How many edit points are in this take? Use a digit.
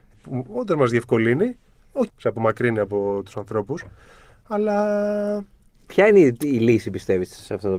1